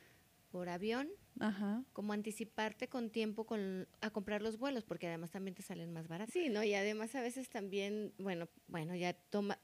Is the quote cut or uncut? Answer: cut